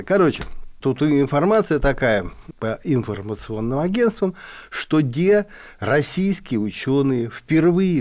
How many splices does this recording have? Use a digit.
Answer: 0